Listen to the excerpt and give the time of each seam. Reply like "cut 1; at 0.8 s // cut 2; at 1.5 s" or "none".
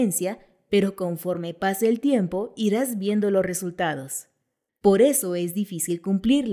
cut 1; at 4.7 s